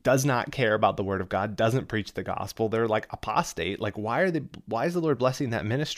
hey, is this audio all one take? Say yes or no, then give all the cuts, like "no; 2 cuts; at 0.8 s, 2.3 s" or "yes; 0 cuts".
yes; 0 cuts